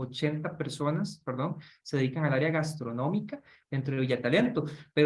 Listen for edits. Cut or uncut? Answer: cut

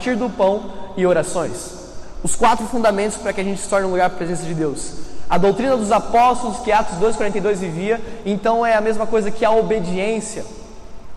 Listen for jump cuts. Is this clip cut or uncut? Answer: uncut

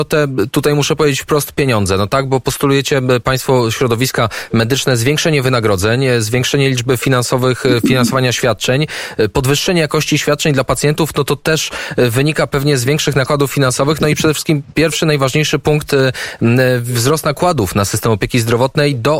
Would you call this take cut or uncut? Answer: uncut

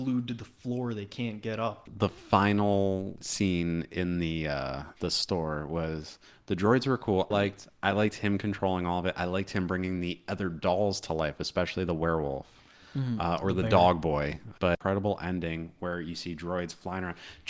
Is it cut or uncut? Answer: cut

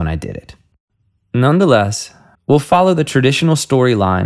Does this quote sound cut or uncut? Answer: cut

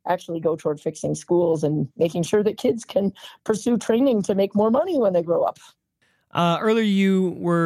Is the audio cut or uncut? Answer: uncut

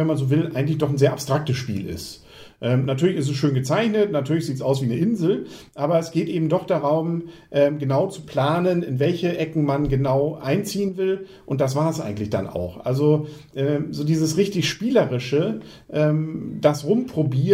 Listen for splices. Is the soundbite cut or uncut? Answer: uncut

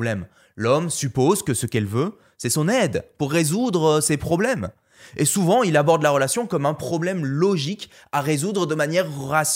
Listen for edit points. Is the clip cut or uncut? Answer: uncut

